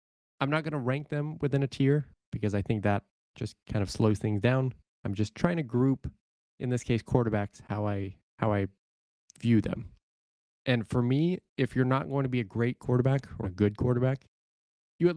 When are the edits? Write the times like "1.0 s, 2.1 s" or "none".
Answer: 10.6 s, 13.4 s